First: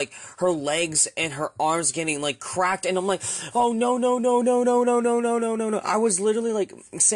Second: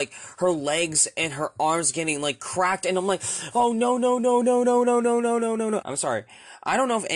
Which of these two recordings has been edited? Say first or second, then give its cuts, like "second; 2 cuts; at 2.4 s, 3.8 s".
second; 1 cut; at 5.8 s